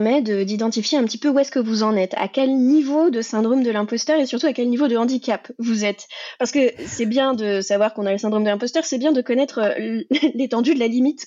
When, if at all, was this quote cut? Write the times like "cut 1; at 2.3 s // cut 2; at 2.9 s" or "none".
none